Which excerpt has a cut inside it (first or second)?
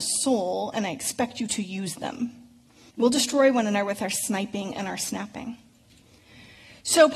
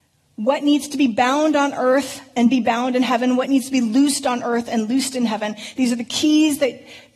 first